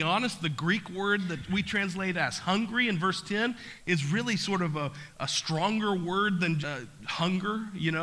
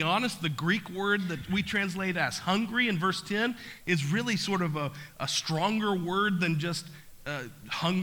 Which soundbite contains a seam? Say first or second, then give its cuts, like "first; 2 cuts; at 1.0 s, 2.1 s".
first; 1 cut; at 6.6 s